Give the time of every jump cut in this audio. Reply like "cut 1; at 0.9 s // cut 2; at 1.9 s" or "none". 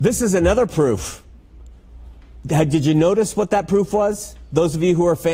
none